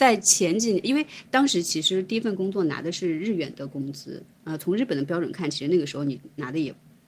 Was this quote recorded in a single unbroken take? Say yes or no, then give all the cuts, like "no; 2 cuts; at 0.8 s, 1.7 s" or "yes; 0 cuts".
yes; 0 cuts